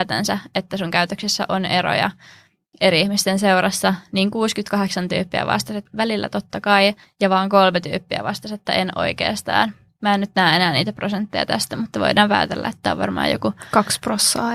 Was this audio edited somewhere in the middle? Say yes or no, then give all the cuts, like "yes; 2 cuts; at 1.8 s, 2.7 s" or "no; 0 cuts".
no; 0 cuts